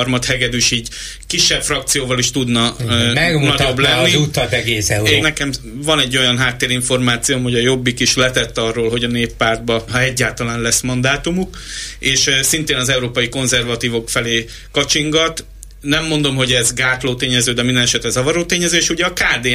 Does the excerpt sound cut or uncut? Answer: cut